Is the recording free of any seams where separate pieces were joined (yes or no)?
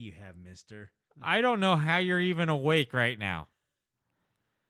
no